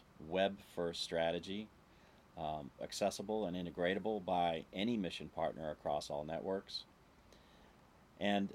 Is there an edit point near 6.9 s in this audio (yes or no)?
no